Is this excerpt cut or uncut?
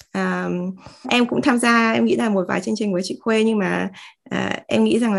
cut